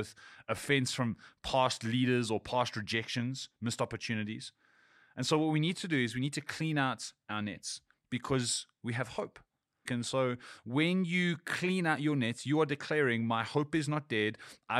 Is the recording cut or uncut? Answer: cut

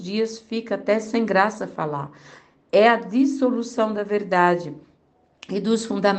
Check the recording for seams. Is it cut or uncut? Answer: uncut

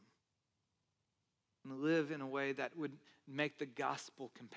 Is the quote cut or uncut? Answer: cut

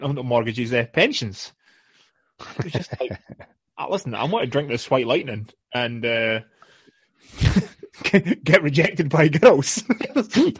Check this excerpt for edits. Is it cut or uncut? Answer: uncut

